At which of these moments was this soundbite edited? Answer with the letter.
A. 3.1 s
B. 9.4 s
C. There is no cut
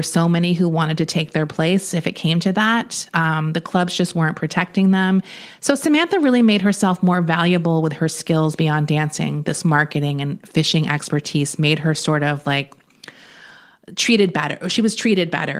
C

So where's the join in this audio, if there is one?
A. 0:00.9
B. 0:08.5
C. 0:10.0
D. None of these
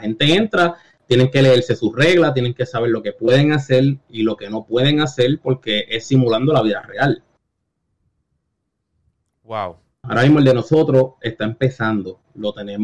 C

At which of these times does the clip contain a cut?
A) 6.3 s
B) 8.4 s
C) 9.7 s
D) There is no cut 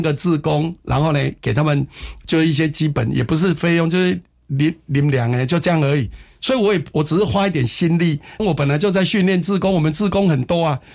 B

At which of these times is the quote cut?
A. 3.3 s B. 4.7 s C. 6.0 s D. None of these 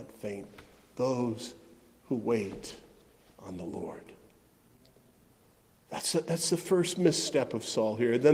D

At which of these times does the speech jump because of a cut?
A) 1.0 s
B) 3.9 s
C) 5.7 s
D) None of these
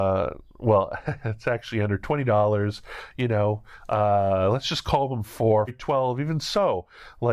C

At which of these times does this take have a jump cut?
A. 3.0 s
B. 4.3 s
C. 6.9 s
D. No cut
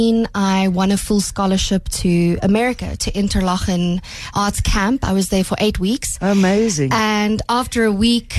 B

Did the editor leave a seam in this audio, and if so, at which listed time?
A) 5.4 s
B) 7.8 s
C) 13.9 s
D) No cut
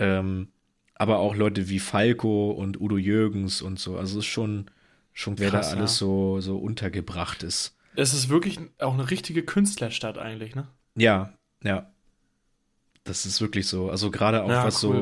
A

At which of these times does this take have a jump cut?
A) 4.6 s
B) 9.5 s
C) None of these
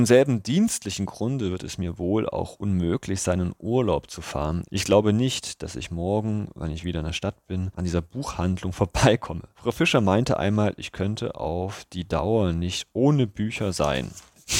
A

